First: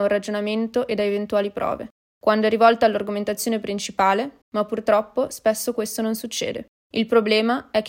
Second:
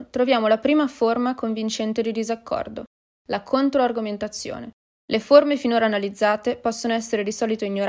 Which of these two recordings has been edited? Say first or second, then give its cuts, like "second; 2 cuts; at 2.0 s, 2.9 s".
first; 2 cuts; at 4.4 s, 6.7 s